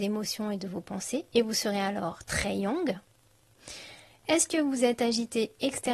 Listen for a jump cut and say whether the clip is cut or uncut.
cut